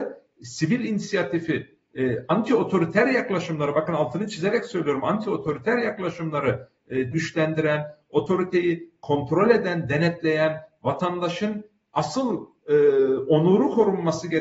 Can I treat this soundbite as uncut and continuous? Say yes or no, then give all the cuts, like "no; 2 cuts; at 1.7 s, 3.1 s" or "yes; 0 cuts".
no; 1 cut; at 7.1 s